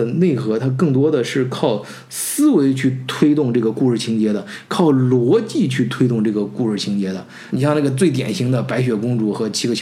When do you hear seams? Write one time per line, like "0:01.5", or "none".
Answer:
none